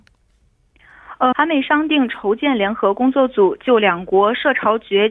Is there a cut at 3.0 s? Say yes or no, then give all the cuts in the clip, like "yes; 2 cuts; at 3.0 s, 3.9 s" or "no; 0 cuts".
no; 1 cut; at 1.3 s